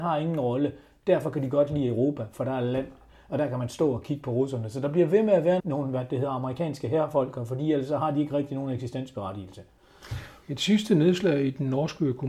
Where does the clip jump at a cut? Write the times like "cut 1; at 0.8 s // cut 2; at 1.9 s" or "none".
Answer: cut 1; at 5.6 s